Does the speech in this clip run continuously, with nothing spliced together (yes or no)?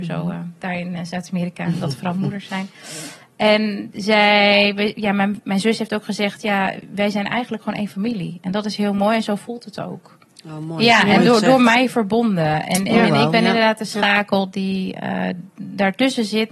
yes